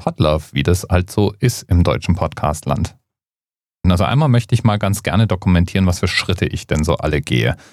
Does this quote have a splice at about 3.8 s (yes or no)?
yes